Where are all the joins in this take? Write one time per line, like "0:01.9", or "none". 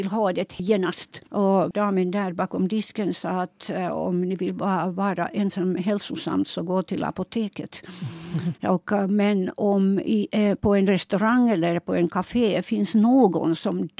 0:01.3
0:08.5